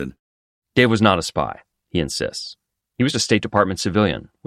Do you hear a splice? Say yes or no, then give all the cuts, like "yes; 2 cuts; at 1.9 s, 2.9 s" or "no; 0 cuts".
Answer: yes; 1 cut; at 3.1 s